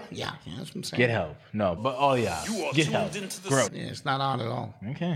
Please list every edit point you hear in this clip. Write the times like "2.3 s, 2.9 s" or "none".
1.8 s, 3.7 s